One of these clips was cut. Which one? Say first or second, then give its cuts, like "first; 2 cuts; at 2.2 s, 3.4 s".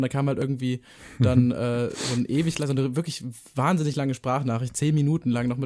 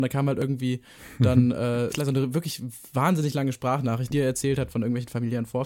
second; 2 cuts; at 1.9 s, 4.1 s